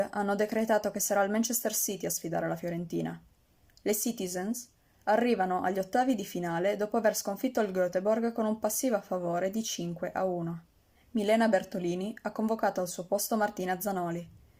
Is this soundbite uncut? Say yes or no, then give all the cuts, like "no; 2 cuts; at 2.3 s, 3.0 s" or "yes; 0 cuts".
no; 2 cuts; at 5.0 s, 10.9 s